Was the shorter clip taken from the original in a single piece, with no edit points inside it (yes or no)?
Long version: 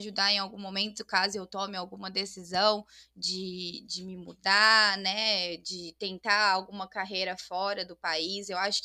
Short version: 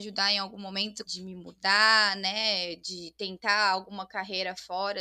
no